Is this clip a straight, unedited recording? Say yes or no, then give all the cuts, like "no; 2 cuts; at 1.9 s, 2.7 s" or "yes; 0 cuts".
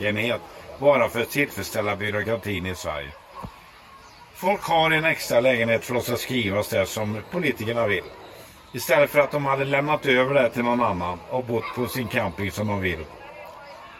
yes; 0 cuts